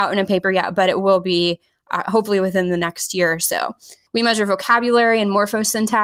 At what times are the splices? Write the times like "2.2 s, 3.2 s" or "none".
4.1 s